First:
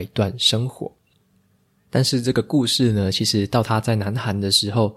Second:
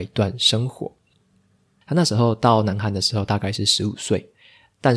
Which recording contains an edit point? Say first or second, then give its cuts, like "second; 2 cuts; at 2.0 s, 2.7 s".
second; 1 cut; at 1.8 s